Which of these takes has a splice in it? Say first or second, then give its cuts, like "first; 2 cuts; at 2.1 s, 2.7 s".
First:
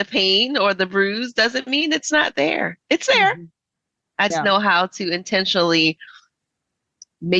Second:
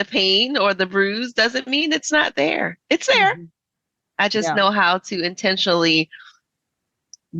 first; 1 cut; at 4.3 s